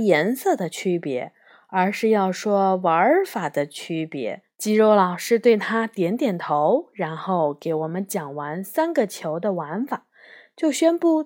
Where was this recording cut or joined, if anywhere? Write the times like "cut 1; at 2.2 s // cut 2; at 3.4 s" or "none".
cut 1; at 4.4 s